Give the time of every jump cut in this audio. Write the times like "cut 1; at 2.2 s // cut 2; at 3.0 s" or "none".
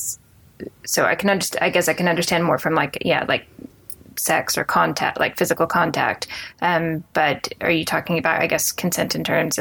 none